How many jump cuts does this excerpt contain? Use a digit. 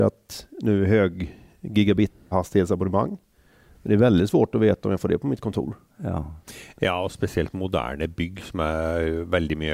1